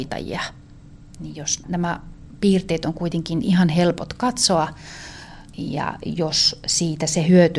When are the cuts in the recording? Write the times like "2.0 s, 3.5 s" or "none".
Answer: 1.6 s